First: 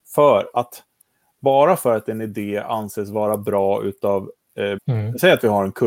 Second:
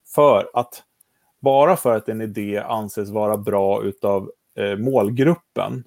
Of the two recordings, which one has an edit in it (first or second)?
first